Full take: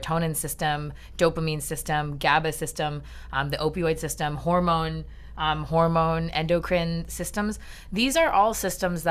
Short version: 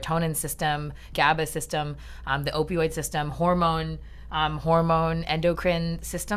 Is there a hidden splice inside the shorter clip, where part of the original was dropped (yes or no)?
yes